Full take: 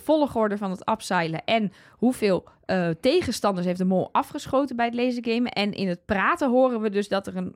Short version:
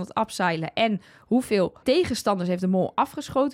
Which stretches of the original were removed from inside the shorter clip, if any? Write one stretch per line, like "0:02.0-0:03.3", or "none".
0:02.5-0:03.0